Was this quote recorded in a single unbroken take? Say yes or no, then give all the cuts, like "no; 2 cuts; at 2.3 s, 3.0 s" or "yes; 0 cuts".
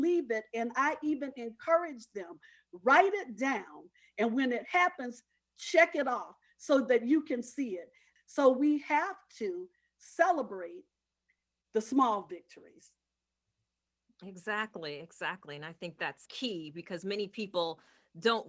no; 2 cuts; at 8.2 s, 16.3 s